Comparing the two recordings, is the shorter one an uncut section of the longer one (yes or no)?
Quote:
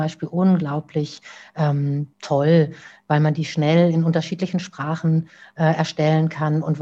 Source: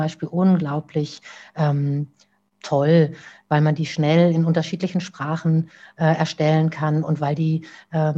no